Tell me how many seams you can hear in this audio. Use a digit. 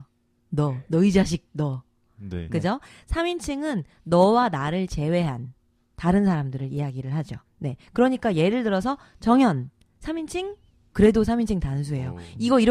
2